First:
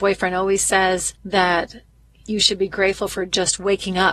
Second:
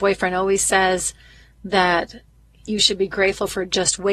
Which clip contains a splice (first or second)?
first